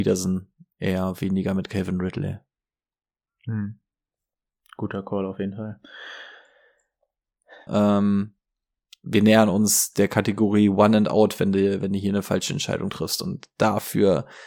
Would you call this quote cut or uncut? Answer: cut